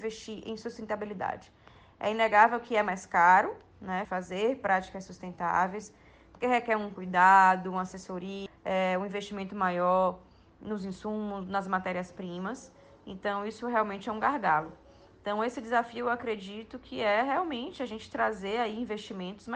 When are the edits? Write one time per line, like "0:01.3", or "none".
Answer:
0:04.0
0:08.5

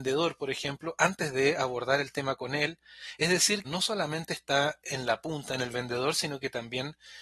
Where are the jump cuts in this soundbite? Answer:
0:03.6

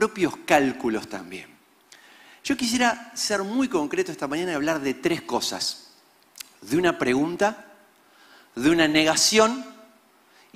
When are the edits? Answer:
none

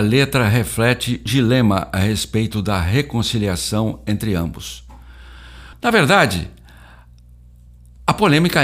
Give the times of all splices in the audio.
0:01.3
0:05.7

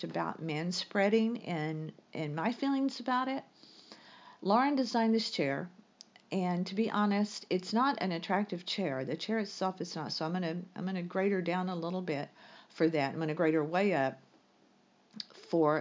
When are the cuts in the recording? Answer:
none

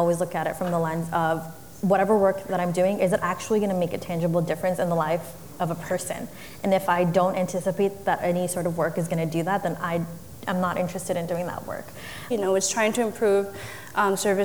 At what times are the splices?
0:12.3

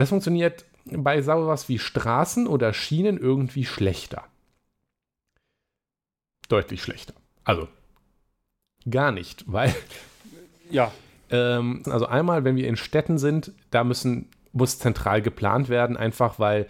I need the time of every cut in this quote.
0:11.8

